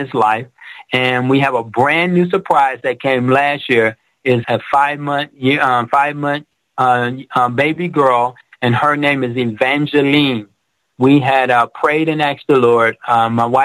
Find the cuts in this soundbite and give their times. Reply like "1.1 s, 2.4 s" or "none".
4.4 s